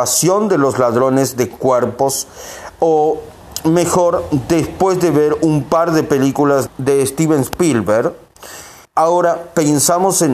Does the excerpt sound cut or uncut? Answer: cut